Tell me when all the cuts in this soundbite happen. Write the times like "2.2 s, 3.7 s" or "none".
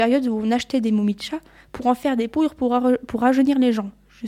none